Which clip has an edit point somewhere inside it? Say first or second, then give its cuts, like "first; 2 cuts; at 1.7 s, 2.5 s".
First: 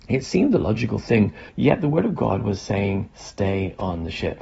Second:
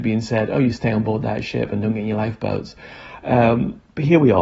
first; 1 cut; at 1.5 s